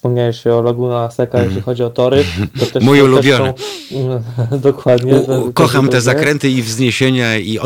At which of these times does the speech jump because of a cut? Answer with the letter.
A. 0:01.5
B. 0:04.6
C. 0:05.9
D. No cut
C